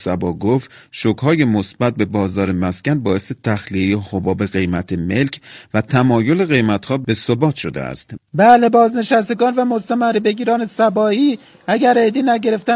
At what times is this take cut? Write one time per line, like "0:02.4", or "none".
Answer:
0:08.2

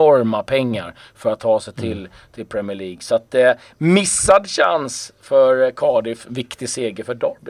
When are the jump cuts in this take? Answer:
none

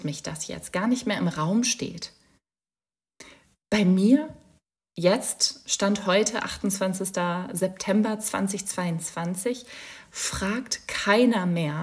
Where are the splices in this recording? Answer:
none

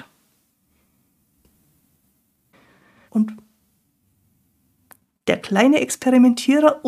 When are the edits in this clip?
0:03.1

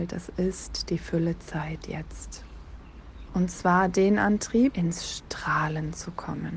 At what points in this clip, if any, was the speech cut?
0:03.3
0:04.7

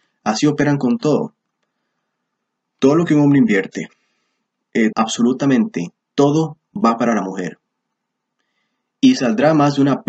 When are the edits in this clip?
0:04.9

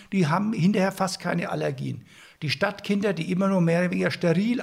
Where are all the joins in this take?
none

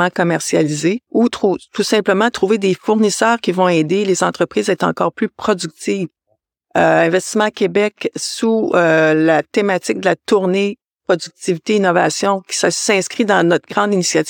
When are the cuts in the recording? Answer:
0:01.1
0:06.2

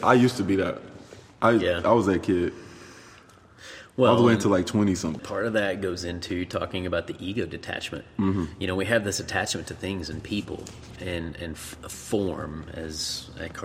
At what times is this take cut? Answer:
0:05.2

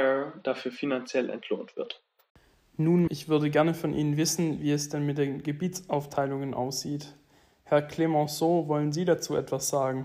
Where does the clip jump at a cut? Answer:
0:03.1

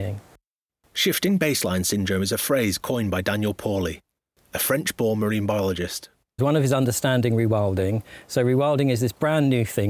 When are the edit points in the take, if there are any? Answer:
0:06.4

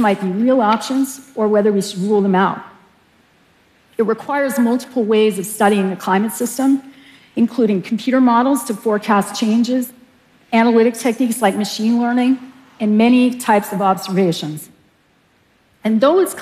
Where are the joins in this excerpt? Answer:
none

